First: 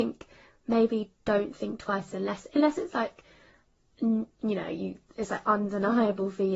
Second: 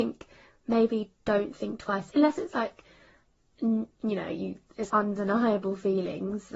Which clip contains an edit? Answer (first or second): second